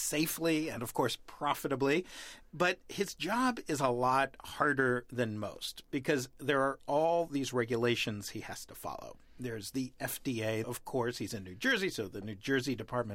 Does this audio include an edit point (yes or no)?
yes